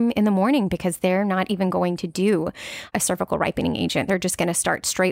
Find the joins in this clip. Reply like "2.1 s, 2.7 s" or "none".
none